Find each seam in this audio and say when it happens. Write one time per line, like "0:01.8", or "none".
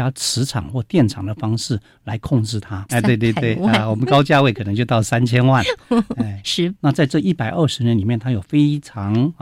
0:02.9
0:06.8